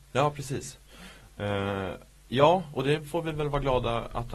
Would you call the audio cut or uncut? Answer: uncut